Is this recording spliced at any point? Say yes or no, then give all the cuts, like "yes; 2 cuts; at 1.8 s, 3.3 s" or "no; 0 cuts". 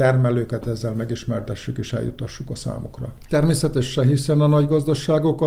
yes; 1 cut; at 3.3 s